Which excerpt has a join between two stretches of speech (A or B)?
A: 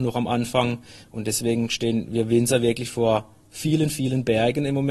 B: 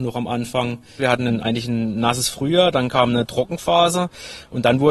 B